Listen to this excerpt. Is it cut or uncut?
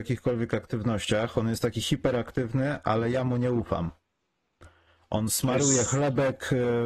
uncut